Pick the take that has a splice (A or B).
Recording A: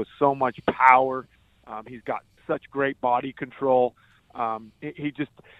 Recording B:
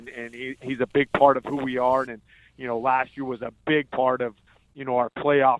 B